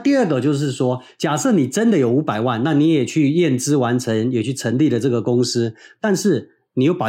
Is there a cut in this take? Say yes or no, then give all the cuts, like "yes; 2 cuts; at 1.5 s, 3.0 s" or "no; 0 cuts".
no; 0 cuts